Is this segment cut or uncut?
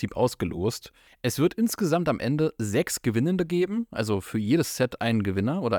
uncut